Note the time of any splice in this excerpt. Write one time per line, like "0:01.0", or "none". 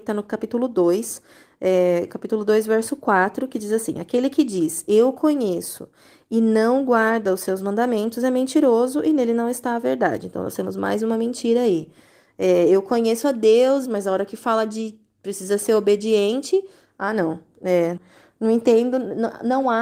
0:13.8
0:18.0